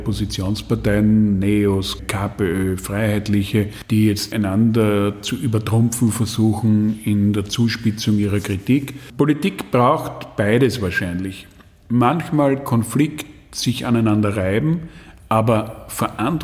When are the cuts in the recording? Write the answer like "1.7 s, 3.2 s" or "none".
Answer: 2.0 s